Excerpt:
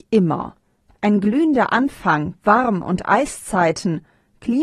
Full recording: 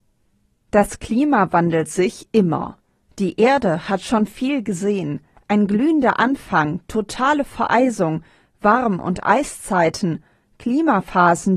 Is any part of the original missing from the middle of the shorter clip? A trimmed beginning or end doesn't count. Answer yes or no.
yes